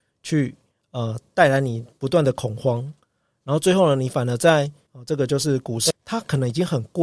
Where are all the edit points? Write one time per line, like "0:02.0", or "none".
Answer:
0:04.9
0:05.9